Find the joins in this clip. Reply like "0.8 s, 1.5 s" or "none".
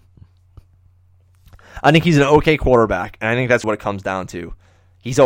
3.6 s